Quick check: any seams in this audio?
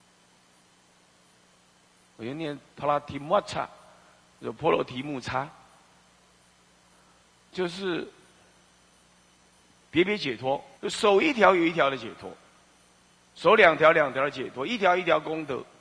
yes; 1 cut; at 10.8 s

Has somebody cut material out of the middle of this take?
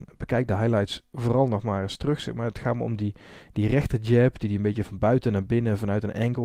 no; 0 cuts

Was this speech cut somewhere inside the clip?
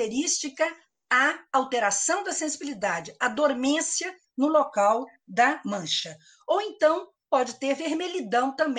no; 0 cuts

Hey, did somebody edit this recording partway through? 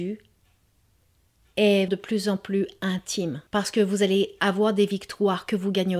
yes; 2 cuts; at 1.9 s, 3.5 s

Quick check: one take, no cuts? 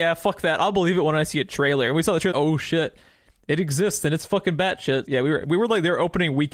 no; 2 cuts; at 2.3 s, 5.1 s

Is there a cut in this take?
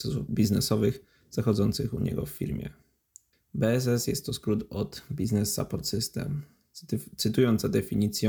yes; 1 cut; at 3.3 s

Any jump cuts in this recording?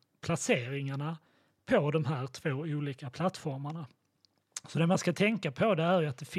no; 0 cuts

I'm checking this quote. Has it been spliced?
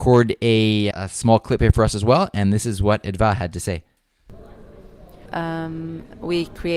yes; 2 cuts; at 0.9 s, 5.3 s

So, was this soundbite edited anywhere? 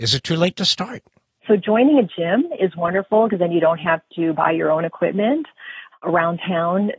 yes; 2 cuts; at 1.4 s, 5.9 s

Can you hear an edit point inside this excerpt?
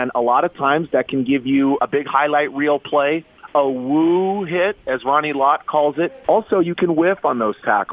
yes; 2 cuts; at 1.8 s, 6.2 s

